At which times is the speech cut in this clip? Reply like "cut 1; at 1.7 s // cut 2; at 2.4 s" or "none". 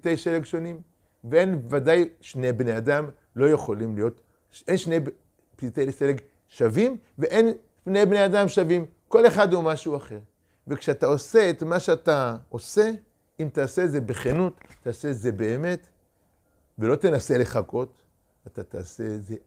none